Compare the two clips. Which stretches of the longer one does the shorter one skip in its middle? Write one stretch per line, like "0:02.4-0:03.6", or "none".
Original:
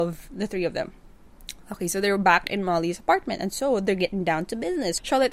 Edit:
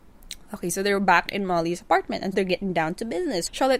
0:03.5-0:03.8

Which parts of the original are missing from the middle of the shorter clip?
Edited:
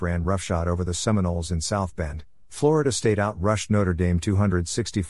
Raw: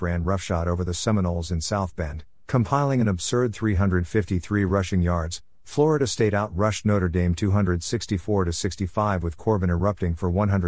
0:02.4-0:05.6

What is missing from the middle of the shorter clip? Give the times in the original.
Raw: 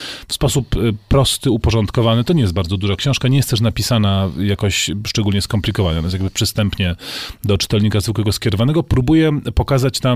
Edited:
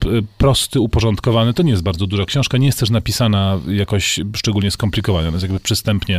none

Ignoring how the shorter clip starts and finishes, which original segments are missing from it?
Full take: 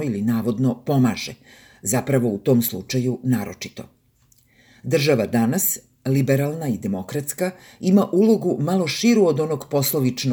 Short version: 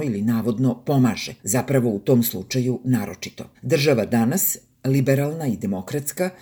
0:01.4-0:01.8
0:03.9-0:04.8

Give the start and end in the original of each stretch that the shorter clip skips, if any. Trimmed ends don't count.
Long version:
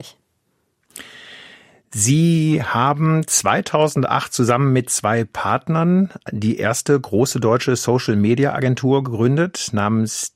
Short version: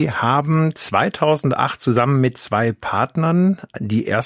none

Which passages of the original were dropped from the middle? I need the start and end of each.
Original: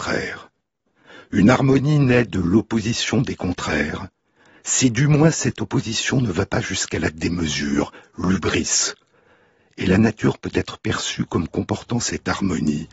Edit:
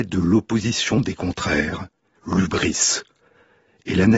0:04.4-0:08.1

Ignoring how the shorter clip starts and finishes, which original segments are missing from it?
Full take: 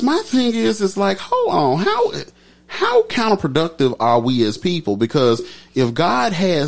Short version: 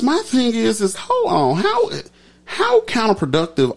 0:00.9-0:01.2

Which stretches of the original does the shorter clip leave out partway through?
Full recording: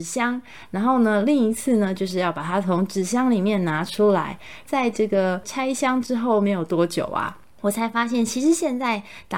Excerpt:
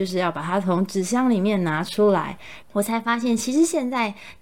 0:04.6-0:07.5

